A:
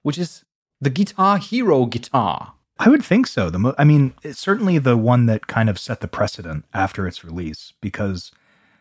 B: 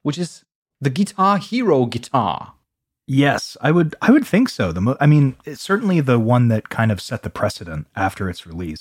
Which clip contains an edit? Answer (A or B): A